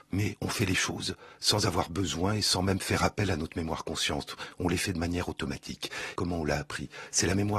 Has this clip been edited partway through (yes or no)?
yes